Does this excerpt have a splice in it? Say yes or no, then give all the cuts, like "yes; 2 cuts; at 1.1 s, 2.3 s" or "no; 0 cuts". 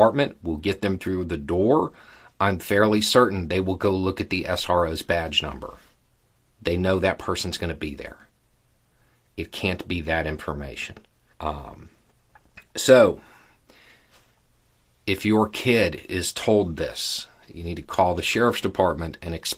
yes; 1 cut; at 11.3 s